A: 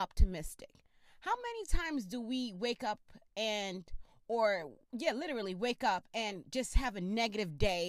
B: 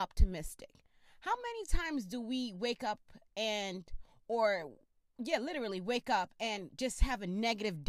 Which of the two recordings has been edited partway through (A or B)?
A